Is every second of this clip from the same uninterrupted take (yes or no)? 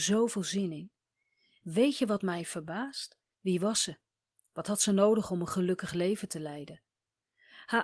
no